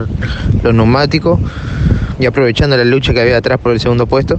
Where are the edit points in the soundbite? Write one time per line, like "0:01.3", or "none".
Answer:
0:02.2